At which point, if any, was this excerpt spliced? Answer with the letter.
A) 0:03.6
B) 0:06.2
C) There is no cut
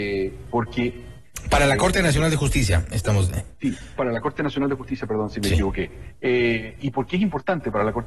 C